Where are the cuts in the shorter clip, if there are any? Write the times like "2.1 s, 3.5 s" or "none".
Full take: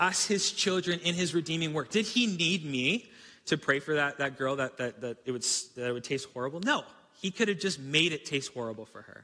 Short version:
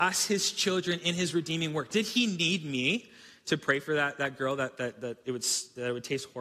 none